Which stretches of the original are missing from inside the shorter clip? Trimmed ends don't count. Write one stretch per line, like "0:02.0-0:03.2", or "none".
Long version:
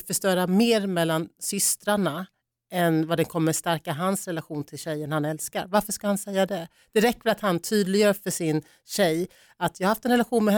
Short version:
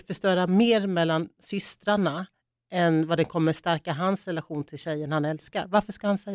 none